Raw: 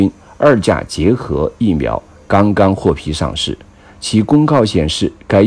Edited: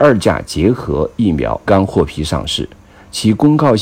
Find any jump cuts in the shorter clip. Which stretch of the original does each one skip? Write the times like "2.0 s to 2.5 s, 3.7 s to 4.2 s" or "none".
2.1 s to 2.5 s